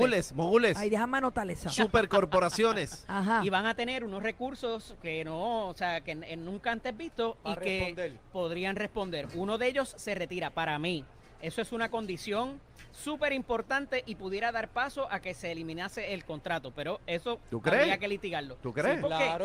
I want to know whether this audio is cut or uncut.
uncut